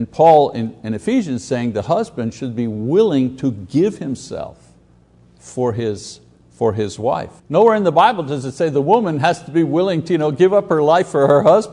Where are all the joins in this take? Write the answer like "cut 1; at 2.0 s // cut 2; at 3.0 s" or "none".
cut 1; at 7.4 s